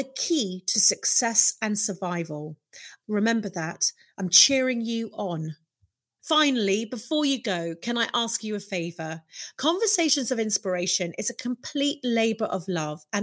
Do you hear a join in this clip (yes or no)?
yes